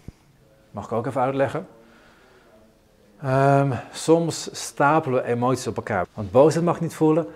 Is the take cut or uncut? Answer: cut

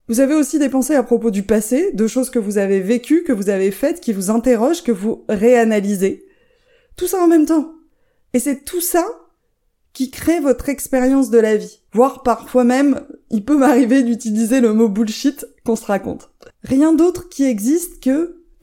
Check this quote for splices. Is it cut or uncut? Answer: cut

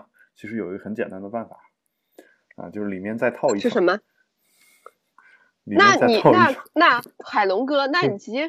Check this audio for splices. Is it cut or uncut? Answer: uncut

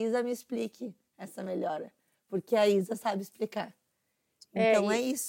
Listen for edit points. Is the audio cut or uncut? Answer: uncut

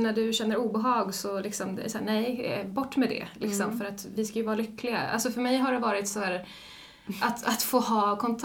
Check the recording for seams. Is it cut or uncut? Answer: cut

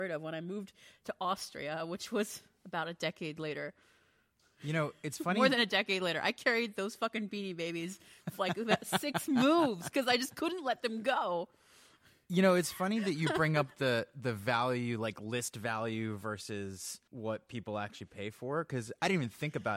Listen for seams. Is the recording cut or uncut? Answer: uncut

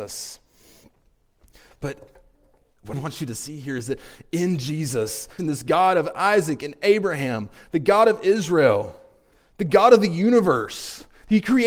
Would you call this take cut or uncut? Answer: cut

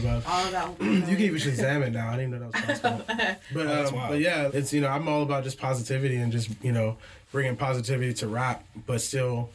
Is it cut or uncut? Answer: cut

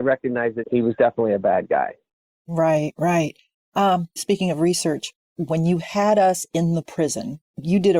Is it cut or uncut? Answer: cut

